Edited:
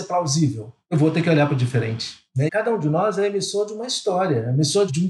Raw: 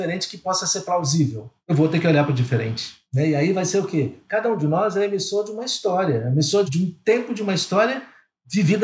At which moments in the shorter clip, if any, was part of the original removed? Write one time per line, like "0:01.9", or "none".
0:02.5